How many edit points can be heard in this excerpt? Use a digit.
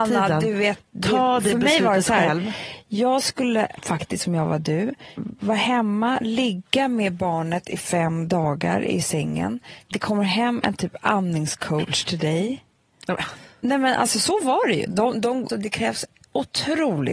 1